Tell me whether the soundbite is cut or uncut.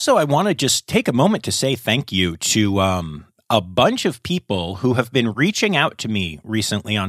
uncut